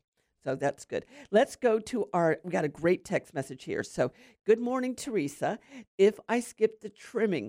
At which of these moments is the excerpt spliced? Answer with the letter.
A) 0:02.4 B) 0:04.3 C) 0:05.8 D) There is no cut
C